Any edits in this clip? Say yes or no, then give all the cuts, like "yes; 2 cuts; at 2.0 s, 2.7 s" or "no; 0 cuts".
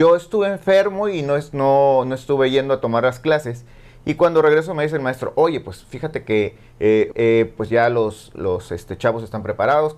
yes; 1 cut; at 7.1 s